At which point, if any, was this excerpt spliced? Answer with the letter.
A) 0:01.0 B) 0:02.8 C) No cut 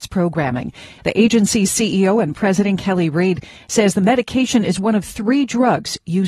A